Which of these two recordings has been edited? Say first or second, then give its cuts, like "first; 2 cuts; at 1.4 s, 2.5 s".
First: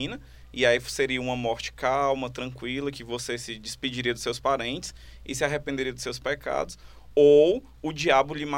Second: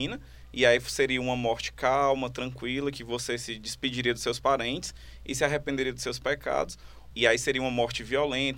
second; 1 cut; at 7.1 s